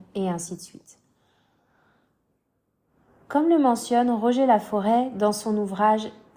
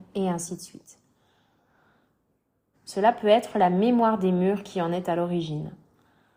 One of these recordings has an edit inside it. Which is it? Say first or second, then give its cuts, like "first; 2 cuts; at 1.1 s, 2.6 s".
second; 1 cut; at 2.7 s